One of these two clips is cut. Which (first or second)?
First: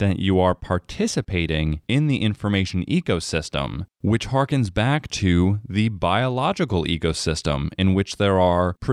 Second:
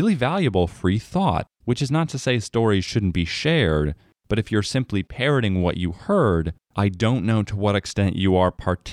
second